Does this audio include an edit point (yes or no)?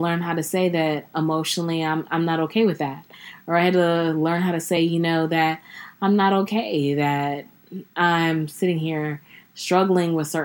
no